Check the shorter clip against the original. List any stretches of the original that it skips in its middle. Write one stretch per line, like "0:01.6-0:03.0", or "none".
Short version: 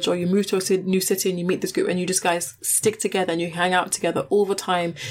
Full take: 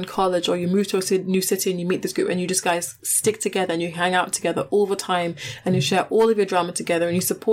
none